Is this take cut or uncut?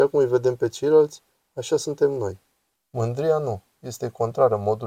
cut